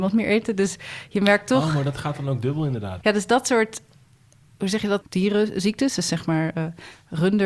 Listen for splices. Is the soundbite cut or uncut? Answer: cut